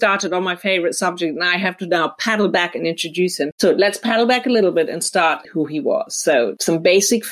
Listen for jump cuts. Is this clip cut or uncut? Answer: cut